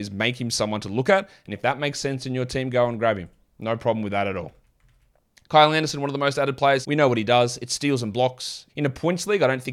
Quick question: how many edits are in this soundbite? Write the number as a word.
two